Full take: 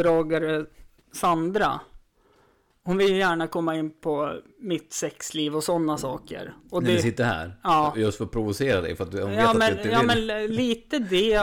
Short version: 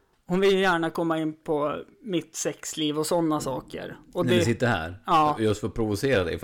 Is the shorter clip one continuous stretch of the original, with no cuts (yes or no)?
yes